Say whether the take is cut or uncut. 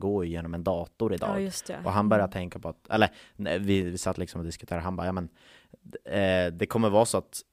uncut